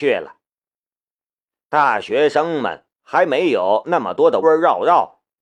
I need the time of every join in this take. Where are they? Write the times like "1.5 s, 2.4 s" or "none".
4.4 s

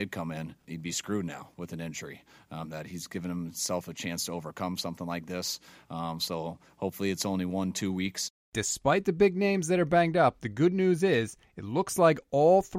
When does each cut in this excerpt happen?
2.6 s, 5.8 s

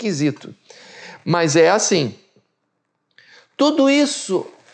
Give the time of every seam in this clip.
none

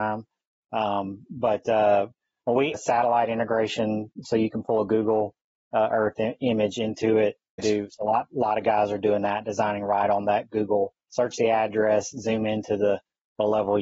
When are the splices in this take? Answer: 2.7 s, 7.6 s

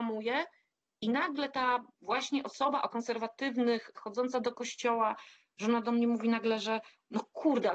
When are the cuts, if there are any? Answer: 1.9 s, 3.9 s

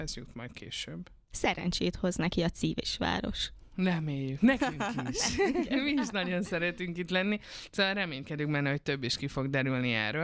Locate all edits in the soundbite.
none

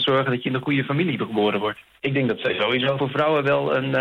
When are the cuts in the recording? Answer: 2.0 s, 3.0 s

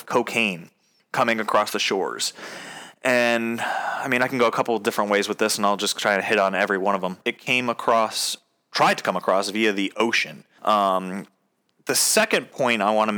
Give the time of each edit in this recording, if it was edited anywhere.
7.2 s, 10.6 s

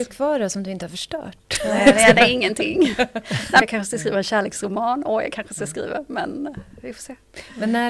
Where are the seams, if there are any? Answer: 3.6 s

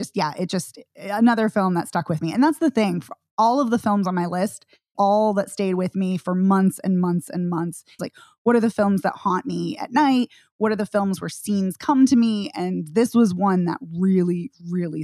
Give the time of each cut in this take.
4.9 s, 8.0 s

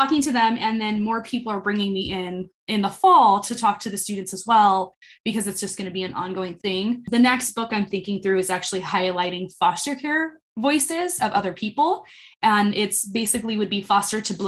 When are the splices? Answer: none

